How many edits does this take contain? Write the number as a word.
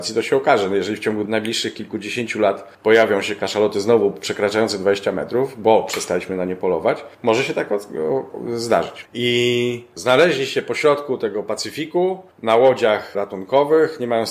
one